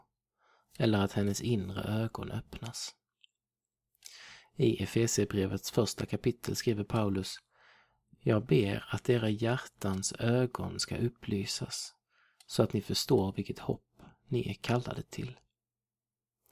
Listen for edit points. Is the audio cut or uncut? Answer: uncut